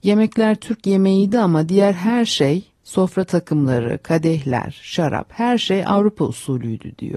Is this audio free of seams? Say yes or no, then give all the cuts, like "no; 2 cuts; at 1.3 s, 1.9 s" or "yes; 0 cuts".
yes; 0 cuts